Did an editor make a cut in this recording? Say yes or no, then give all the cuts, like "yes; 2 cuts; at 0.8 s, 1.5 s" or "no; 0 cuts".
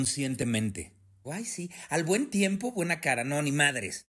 yes; 1 cut; at 1.2 s